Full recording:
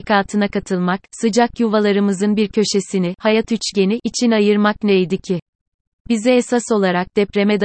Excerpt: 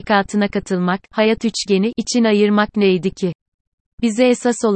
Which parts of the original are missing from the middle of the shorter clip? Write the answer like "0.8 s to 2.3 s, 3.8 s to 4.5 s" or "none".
1.1 s to 3.2 s